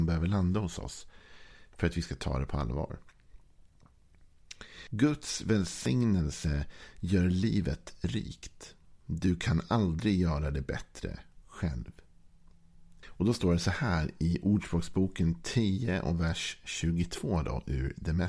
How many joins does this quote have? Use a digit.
2